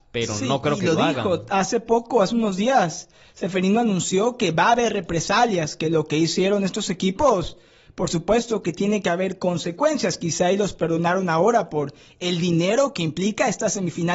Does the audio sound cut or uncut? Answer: uncut